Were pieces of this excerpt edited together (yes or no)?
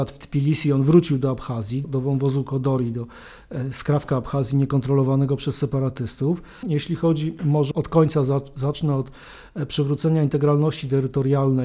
yes